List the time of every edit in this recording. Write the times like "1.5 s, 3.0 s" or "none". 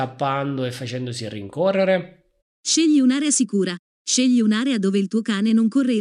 2.4 s